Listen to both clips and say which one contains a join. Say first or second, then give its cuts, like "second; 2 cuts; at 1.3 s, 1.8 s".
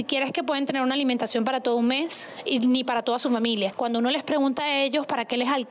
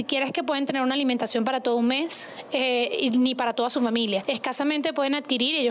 first; 2 cuts; at 2.5 s, 3.7 s